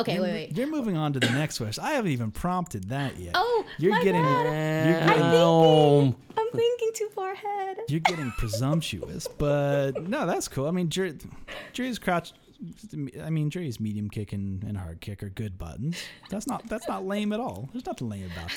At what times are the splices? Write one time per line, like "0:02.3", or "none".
none